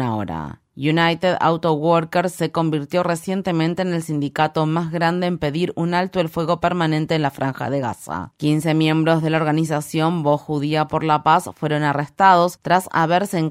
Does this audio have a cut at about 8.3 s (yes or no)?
yes